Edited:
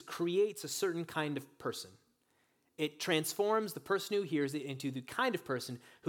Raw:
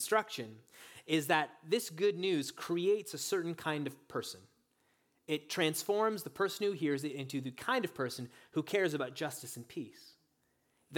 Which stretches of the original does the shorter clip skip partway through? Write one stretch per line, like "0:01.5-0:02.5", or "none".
none